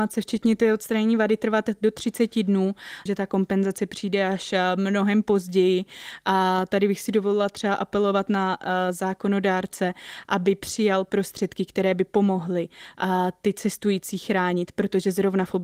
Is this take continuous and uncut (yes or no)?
no